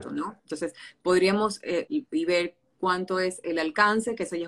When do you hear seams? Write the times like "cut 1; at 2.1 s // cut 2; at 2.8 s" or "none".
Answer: cut 1; at 1.9 s